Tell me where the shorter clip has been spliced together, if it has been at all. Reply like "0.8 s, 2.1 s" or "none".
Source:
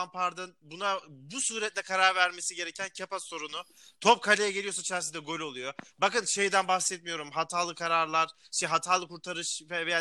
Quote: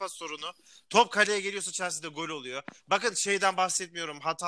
none